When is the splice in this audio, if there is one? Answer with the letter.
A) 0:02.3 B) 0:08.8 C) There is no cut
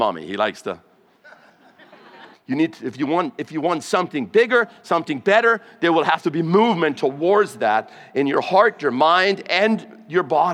A